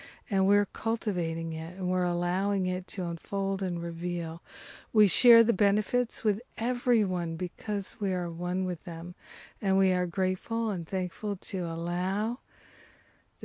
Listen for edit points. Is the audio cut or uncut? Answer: uncut